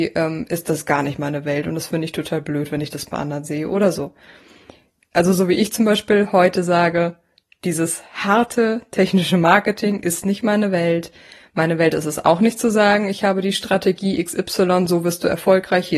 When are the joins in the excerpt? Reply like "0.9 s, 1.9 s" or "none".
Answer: none